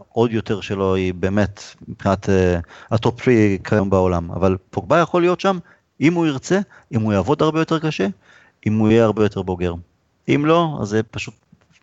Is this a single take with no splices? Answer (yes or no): yes